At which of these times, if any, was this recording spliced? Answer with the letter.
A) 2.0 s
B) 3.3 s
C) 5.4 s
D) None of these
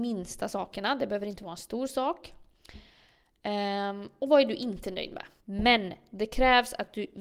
C